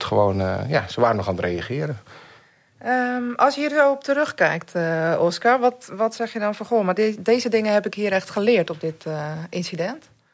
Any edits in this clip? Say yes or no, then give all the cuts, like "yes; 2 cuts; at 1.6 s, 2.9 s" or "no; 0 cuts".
no; 0 cuts